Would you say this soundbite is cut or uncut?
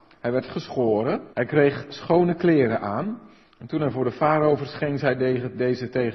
cut